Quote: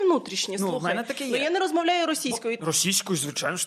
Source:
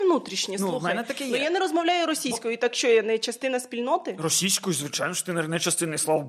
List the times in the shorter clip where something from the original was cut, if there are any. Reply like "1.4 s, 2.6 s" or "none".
2.6 s

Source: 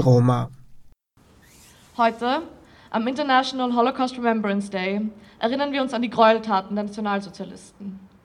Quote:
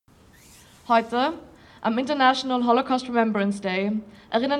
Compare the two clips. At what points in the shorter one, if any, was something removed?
none

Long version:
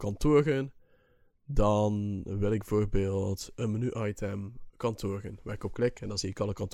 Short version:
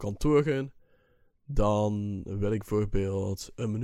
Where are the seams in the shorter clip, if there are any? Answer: none

